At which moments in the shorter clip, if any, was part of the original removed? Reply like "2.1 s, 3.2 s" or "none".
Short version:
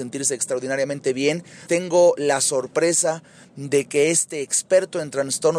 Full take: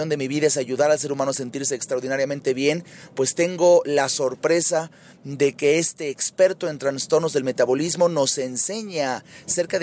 1.7 s

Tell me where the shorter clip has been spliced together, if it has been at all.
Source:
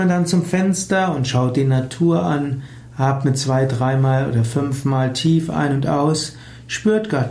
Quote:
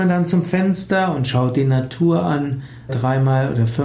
2.9 s

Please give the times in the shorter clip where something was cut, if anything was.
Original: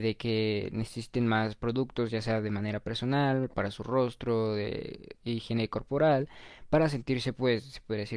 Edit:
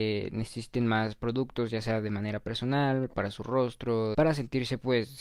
4.1 s

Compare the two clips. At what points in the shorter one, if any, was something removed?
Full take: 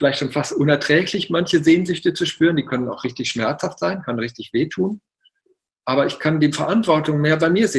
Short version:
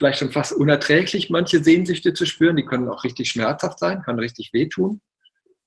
none

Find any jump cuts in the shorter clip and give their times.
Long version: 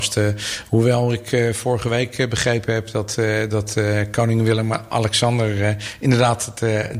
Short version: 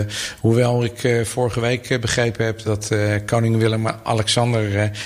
2.6 s

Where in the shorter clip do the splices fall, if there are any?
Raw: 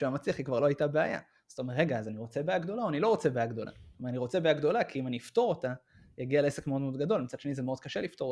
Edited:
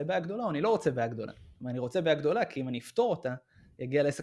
none

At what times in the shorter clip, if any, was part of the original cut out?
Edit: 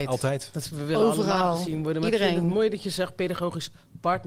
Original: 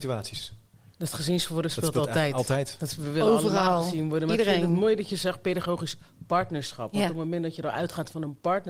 none

